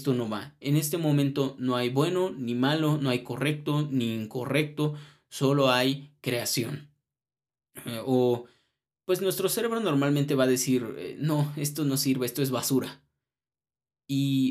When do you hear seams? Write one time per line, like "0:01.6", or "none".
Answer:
none